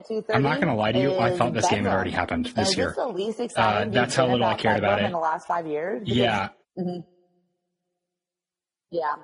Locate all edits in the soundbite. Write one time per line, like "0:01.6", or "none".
0:06.6